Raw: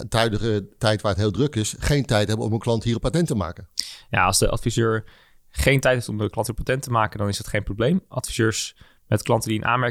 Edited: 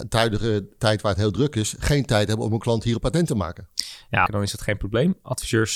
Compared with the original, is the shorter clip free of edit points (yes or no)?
no